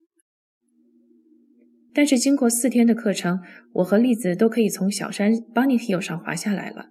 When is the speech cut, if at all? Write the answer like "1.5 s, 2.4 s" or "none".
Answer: 1.9 s